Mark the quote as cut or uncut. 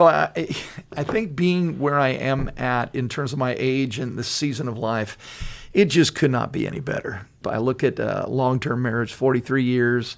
cut